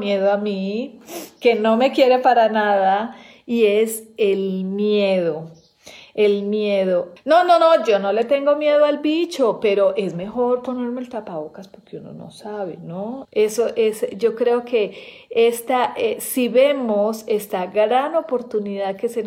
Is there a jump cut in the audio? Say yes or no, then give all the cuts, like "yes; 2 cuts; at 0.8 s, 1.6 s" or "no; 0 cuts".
yes; 2 cuts; at 7.2 s, 13.2 s